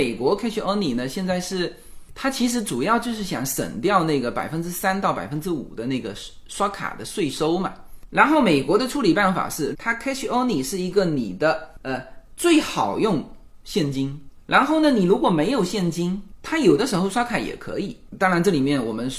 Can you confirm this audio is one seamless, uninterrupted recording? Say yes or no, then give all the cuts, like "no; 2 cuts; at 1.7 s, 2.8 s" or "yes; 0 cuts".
no; 1 cut; at 9.7 s